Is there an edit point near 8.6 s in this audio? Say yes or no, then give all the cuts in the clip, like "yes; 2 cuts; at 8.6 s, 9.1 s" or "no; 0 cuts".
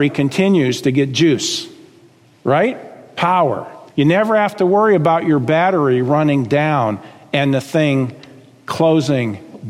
no; 1 cut; at 3.9 s